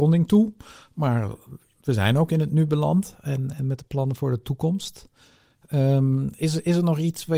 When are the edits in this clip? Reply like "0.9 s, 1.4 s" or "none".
none